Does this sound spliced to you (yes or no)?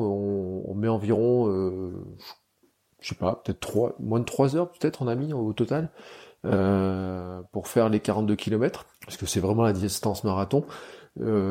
yes